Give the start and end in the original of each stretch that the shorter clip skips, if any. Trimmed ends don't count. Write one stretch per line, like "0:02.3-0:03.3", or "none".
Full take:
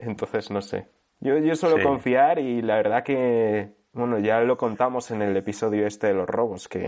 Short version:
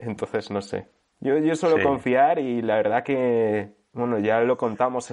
none